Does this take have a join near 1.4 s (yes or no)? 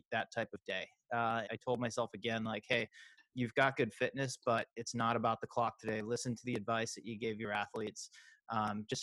yes